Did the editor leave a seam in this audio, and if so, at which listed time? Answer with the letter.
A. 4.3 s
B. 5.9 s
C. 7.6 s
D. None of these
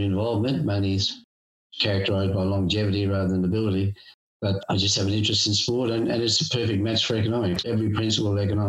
D